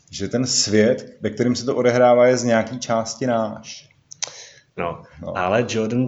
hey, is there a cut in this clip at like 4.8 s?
yes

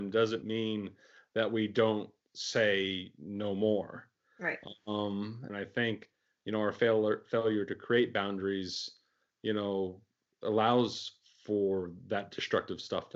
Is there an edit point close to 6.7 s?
no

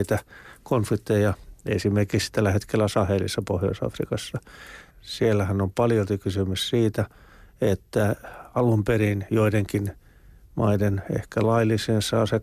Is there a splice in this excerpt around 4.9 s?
yes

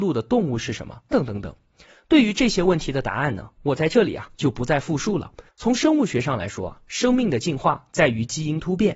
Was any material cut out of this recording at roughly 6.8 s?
no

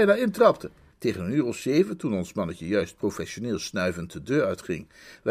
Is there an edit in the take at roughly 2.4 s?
no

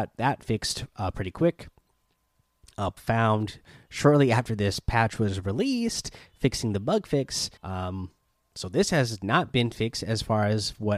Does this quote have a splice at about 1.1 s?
no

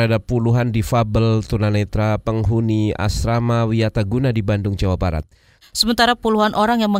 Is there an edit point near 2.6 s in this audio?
no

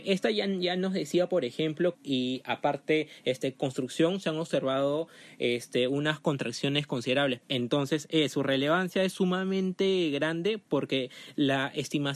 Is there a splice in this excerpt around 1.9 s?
yes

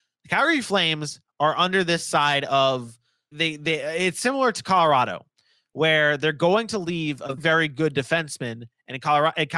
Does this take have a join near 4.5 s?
no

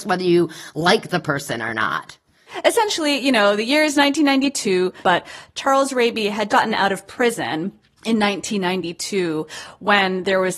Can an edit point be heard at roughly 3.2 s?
no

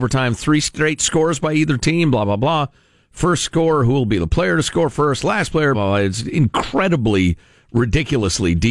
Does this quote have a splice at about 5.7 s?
yes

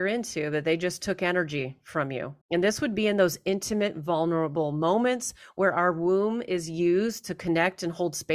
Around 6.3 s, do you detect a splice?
no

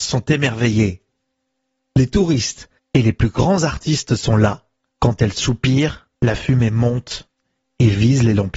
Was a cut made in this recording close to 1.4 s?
no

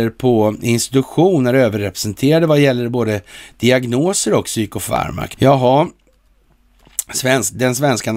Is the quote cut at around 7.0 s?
no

